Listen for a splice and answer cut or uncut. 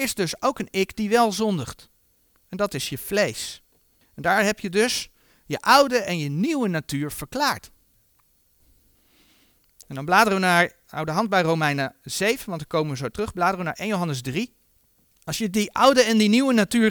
uncut